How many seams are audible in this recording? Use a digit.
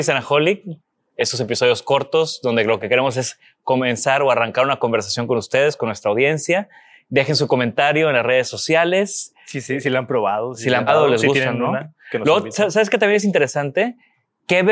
1